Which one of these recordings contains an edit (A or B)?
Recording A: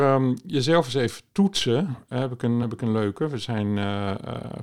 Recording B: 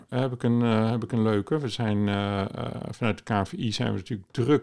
A